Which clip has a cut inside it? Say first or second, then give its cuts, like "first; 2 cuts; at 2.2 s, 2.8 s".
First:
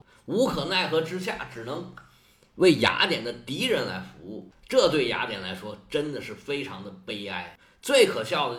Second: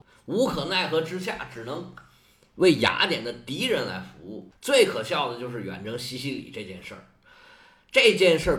second; 1 cut; at 4.6 s